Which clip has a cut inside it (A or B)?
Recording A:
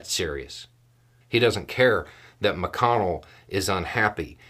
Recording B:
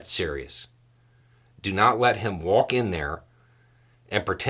A